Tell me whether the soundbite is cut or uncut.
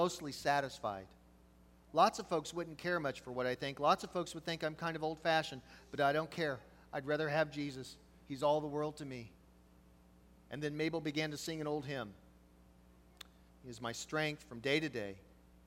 cut